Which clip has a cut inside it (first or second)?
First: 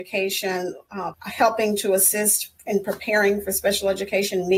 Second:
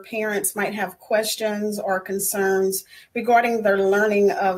first